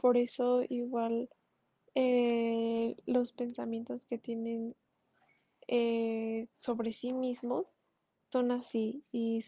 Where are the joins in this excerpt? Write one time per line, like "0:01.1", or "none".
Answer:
0:08.3